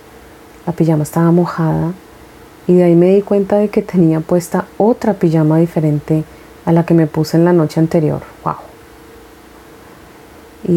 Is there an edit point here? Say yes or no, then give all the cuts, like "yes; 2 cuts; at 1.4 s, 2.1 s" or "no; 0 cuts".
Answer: no; 0 cuts